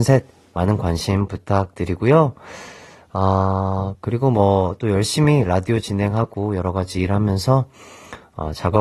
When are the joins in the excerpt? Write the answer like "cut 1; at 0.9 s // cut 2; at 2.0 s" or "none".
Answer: none